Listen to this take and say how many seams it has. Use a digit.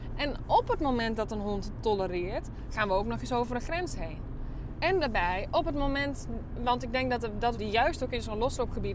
2